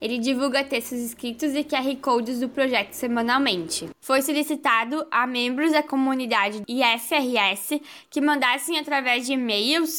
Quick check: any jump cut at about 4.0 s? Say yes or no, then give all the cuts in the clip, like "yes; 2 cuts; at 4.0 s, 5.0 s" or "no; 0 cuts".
yes; 1 cut; at 4.0 s